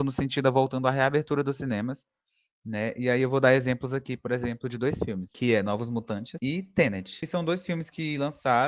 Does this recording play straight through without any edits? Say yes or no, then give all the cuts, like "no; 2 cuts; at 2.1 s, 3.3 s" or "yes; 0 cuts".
yes; 0 cuts